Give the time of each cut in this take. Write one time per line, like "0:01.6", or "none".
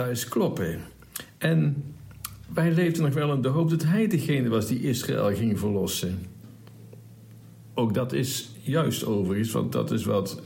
none